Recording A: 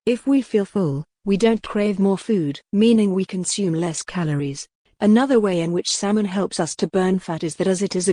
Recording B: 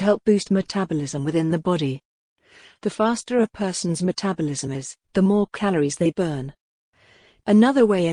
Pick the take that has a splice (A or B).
A